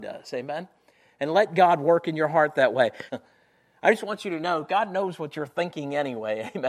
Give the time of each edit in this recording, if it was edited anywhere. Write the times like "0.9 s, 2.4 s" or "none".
3.1 s